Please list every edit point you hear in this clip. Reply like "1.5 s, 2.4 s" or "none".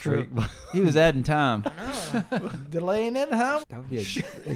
3.6 s